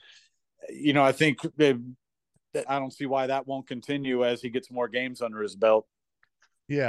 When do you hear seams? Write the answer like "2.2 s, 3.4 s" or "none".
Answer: 2.7 s